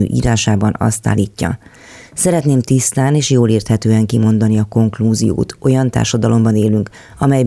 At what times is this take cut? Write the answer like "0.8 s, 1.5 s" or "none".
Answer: none